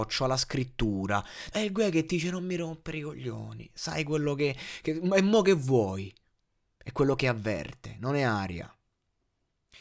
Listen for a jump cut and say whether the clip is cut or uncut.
cut